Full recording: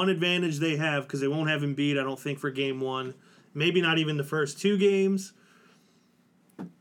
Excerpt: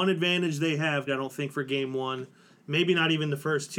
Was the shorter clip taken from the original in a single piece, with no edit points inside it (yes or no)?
no